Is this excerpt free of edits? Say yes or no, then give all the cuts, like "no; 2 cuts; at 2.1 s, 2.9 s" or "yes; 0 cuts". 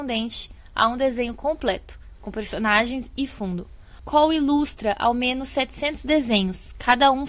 yes; 0 cuts